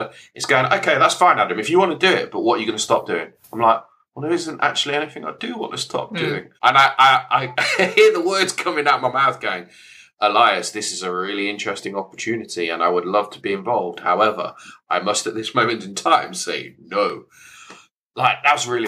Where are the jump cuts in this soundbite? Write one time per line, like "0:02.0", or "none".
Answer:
0:06.6